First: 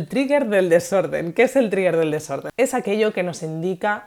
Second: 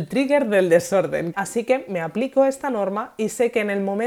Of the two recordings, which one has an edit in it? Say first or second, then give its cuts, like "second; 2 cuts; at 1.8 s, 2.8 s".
second; 1 cut; at 1.3 s